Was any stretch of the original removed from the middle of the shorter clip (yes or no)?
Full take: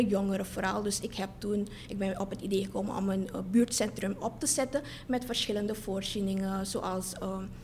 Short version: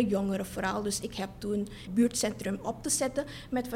yes